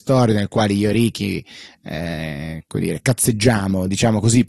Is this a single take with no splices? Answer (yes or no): yes